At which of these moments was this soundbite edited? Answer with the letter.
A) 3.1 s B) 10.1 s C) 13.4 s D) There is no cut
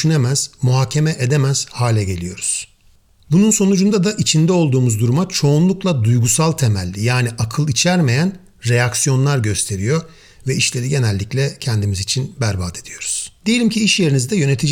C